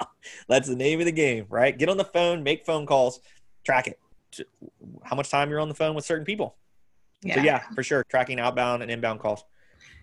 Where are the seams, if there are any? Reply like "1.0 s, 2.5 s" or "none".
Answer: 4.2 s, 8.0 s